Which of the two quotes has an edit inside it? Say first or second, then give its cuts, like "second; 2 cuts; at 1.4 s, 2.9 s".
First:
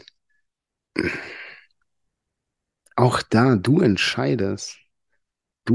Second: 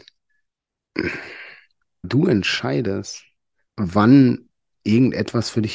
second; 2 cuts; at 2.0 s, 3.7 s